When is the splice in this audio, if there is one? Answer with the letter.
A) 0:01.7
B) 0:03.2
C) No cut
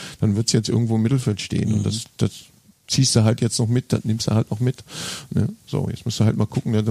C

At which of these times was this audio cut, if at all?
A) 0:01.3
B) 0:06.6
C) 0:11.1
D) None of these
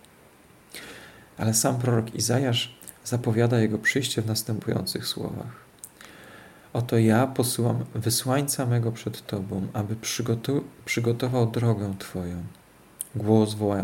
A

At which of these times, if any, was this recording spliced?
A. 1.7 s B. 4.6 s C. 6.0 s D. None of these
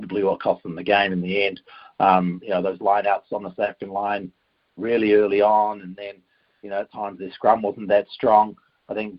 D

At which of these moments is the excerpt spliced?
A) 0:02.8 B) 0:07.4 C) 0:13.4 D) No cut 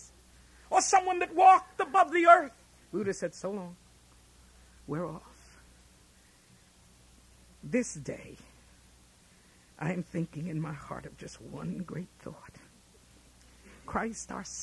A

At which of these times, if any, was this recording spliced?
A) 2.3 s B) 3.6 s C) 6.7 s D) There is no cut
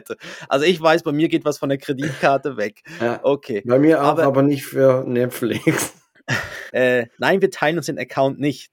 C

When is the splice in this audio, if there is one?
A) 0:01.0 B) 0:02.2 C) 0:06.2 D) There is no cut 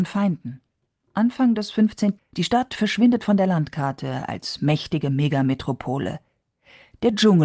B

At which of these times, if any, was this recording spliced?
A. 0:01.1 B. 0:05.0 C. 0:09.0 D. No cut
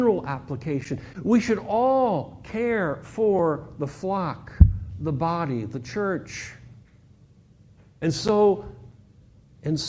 A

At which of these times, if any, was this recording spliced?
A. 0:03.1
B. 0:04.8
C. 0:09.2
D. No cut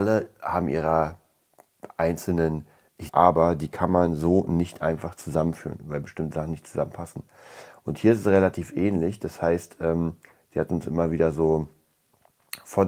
A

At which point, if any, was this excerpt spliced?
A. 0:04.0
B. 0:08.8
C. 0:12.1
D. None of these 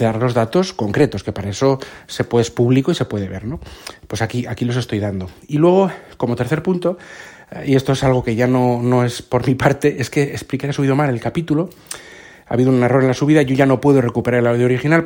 D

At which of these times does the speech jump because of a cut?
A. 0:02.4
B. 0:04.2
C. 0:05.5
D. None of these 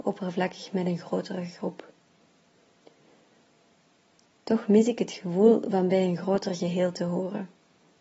D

